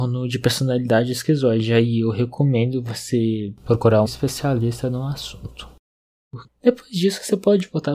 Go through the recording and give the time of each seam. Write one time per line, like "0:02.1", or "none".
0:04.0
0:06.5

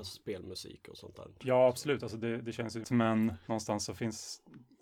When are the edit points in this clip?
0:02.8

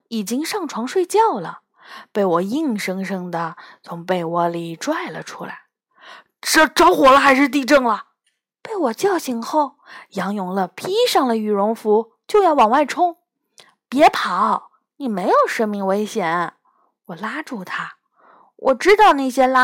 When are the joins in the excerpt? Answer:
none

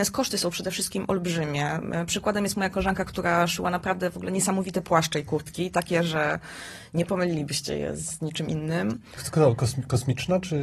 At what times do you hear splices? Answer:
0:09.2

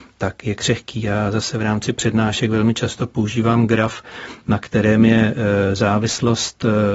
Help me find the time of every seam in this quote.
none

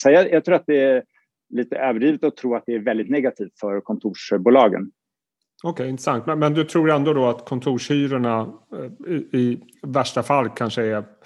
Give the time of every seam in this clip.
none

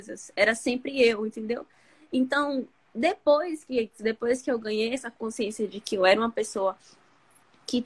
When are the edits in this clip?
0:04.0

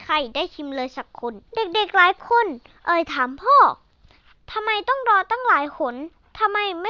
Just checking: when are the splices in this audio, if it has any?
0:01.4

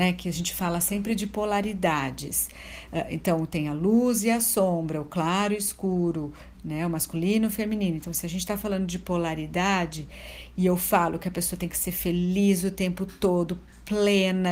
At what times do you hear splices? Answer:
none

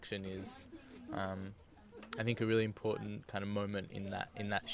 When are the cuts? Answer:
none

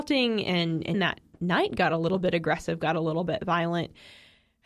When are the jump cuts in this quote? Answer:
0:00.9

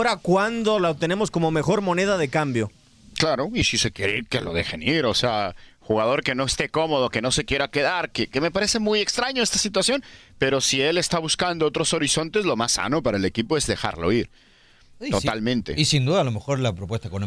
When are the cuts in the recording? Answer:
none

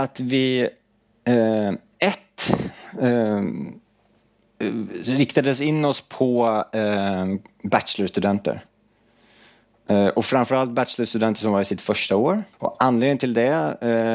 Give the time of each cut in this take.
0:12.5

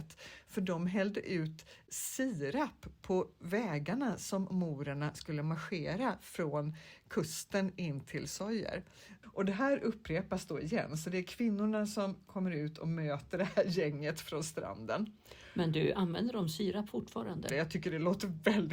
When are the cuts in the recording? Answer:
0:09.2
0:17.5

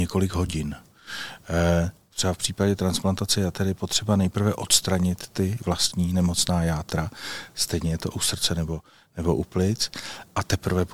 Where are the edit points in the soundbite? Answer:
0:02.1

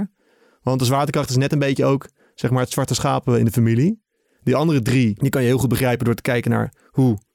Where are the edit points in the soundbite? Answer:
none

